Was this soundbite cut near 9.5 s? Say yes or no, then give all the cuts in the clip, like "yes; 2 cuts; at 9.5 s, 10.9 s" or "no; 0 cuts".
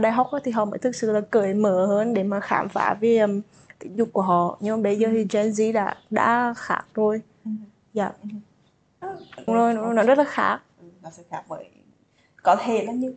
yes; 1 cut; at 9.5 s